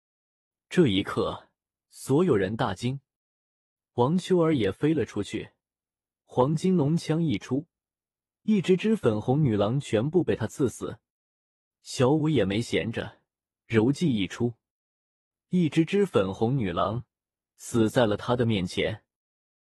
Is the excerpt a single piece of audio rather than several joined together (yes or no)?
yes